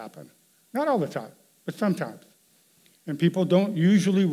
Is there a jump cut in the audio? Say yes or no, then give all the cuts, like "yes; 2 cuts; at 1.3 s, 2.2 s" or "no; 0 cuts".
no; 0 cuts